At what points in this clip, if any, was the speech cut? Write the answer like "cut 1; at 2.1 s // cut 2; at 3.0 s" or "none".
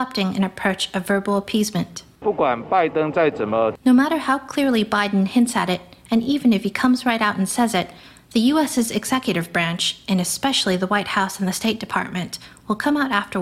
none